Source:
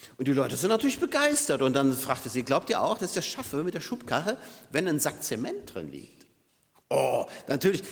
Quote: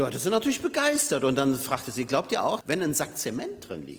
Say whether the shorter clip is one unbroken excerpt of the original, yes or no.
no